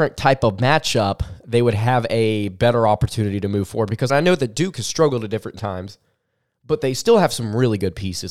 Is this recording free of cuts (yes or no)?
no